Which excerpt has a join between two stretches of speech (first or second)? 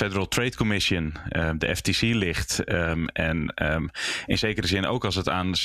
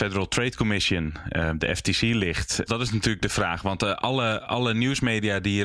second